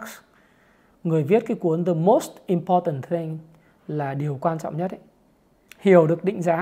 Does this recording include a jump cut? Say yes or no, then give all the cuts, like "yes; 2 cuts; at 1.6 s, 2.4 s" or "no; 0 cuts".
yes; 1 cut; at 5.7 s